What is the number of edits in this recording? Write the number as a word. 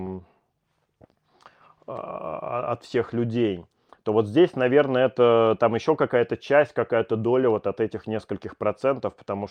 zero